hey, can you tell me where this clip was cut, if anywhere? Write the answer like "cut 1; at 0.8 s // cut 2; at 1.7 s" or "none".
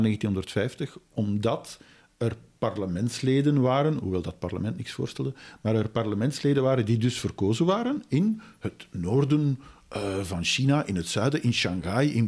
none